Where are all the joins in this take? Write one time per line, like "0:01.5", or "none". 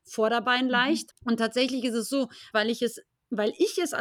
0:01.1
0:02.5